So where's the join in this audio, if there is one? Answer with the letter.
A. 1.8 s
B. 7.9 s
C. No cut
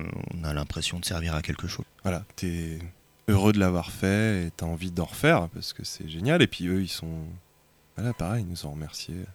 A